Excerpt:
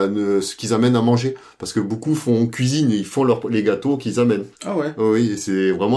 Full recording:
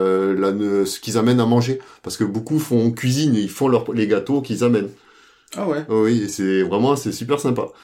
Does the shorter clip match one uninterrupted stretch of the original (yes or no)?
no